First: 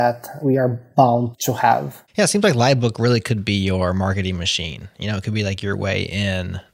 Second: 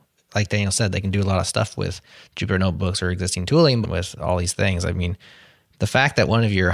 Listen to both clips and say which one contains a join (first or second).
second